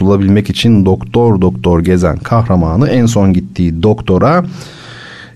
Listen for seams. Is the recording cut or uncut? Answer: uncut